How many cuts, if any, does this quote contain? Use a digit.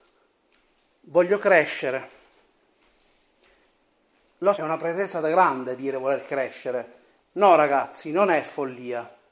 2